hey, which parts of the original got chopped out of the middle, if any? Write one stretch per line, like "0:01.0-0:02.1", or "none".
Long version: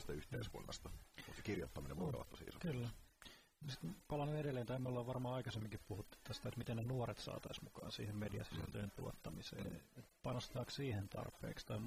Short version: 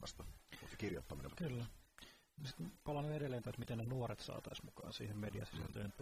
0:01.9-0:02.5
0:04.7-0:06.4